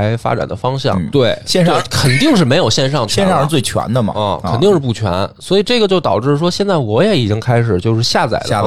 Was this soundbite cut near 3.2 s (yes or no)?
no